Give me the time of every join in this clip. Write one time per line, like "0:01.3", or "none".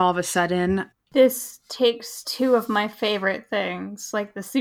0:00.9